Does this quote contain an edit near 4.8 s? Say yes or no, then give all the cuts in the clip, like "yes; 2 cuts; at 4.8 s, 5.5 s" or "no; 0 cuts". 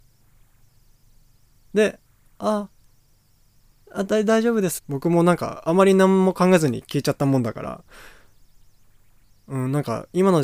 yes; 1 cut; at 4.8 s